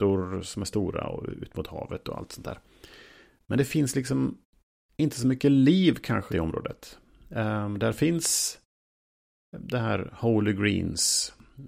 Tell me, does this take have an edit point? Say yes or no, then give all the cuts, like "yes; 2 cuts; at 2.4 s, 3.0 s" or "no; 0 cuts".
yes; 1 cut; at 6.3 s